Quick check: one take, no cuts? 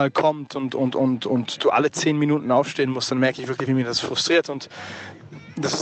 yes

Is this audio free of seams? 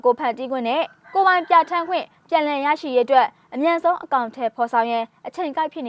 yes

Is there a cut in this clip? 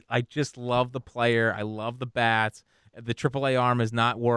no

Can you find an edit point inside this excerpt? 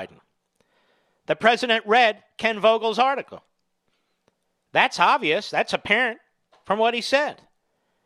no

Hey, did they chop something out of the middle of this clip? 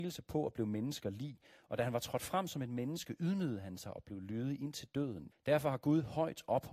yes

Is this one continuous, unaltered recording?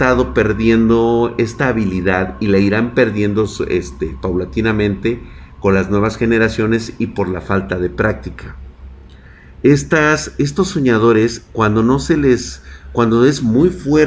yes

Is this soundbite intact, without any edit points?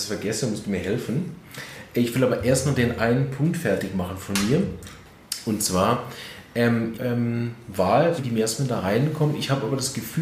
no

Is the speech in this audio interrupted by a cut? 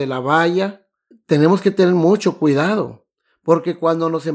yes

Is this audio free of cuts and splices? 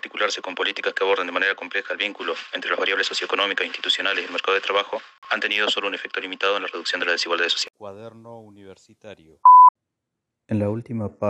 yes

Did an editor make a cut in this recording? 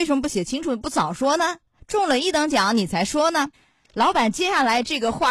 yes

